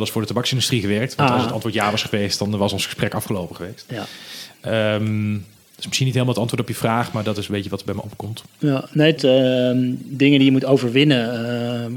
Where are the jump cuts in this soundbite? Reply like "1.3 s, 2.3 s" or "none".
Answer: 9.2 s